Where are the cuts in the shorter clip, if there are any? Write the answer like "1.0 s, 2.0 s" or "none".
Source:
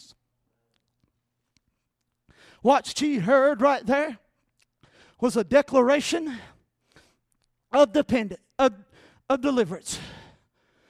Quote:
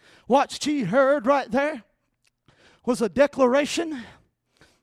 none